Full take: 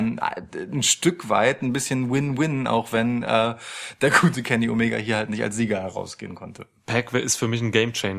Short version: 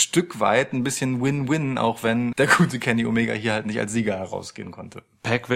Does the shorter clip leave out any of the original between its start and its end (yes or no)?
yes